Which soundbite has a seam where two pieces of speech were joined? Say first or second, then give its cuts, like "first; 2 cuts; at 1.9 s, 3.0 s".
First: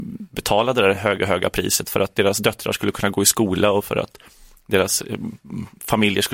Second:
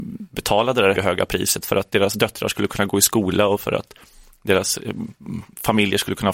second; 1 cut; at 1.0 s